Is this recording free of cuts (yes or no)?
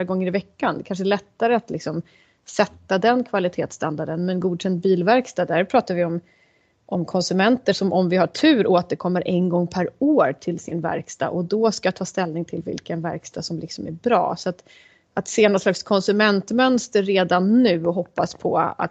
yes